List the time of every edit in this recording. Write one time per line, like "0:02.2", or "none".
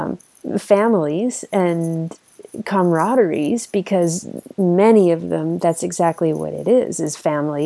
none